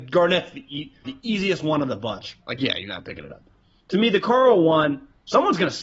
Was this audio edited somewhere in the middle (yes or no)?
yes